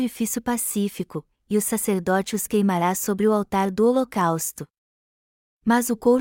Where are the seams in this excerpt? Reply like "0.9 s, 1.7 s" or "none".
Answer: none